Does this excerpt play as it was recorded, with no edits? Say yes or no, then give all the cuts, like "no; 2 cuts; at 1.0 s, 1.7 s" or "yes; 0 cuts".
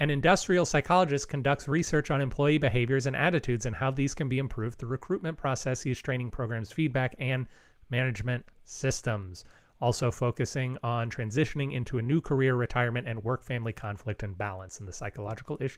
yes; 0 cuts